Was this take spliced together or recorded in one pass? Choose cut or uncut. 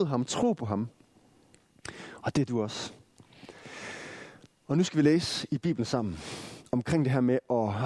uncut